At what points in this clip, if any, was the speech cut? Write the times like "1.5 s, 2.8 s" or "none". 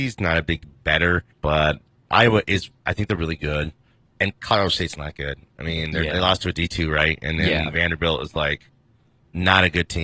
1.3 s